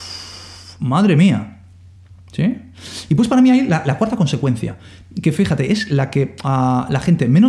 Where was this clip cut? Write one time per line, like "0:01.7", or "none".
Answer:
none